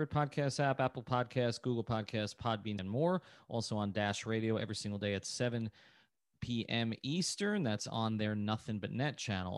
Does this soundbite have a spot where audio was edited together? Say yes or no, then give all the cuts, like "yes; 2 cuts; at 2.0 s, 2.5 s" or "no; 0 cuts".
yes; 1 cut; at 2.8 s